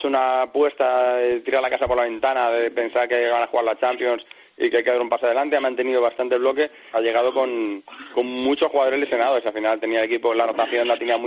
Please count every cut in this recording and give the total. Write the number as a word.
one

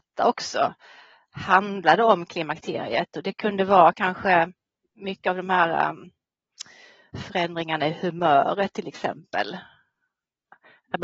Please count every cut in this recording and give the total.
zero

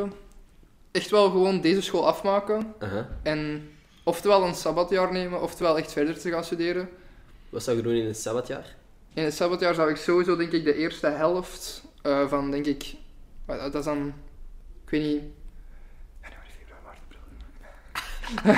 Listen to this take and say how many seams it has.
zero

